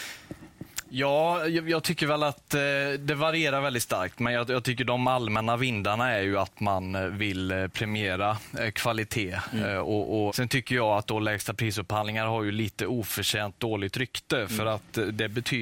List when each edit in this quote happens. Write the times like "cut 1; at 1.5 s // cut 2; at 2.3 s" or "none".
cut 1; at 10.3 s